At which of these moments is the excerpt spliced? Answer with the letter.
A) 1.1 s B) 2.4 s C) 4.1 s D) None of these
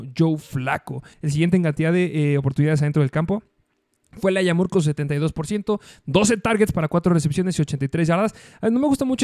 A